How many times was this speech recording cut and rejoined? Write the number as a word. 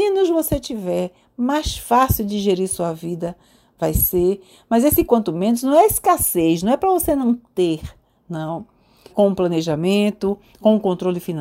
one